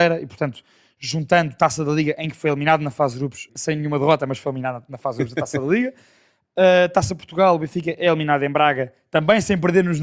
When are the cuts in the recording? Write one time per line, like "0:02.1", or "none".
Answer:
0:03.5